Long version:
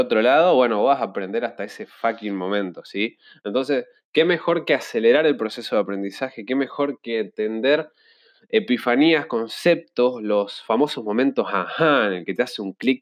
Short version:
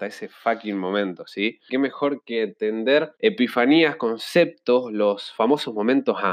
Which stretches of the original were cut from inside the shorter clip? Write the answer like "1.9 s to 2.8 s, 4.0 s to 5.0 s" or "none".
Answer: 3.3 s to 6.5 s, 7.9 s to 8.5 s